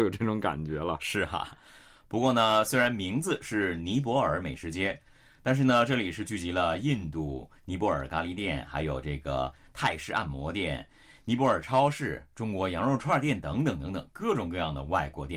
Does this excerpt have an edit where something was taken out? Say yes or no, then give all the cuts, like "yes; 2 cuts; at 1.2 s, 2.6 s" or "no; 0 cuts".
no; 0 cuts